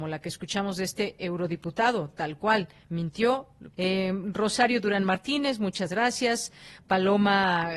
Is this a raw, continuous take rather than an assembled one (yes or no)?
no